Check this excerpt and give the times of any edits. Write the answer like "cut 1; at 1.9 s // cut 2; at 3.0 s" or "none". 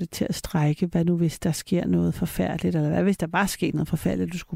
none